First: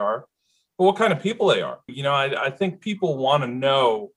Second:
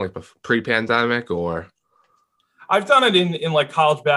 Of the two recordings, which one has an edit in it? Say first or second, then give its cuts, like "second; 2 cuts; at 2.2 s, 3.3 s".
first; 1 cut; at 1.9 s